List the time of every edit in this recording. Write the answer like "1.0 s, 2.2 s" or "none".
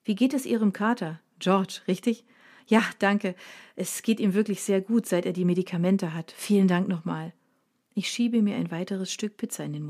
none